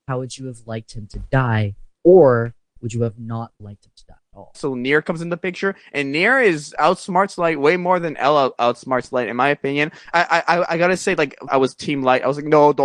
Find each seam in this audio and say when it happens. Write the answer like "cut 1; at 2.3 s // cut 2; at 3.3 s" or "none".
cut 1; at 4.5 s // cut 2; at 10.1 s // cut 3; at 11.5 s